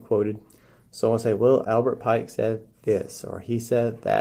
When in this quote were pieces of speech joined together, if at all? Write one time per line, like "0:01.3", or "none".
0:01.6